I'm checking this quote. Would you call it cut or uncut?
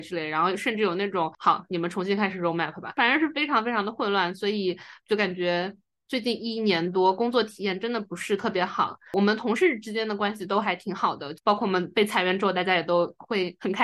cut